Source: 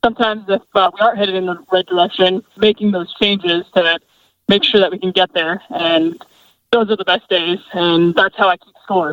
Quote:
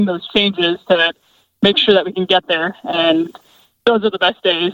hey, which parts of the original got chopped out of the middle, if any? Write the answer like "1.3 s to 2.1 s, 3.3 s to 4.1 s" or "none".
none